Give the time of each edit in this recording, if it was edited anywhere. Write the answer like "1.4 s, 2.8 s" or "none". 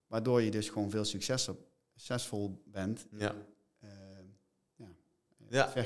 none

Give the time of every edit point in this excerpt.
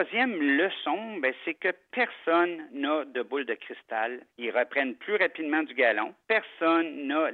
4.3 s, 6.2 s

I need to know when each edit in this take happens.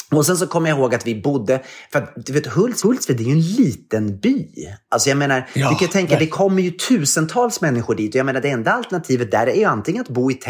2.8 s

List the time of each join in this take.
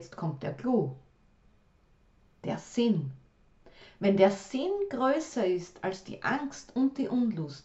none

